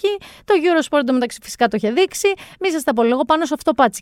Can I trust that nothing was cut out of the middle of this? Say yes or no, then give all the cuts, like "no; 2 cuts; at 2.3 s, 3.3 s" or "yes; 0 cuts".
yes; 0 cuts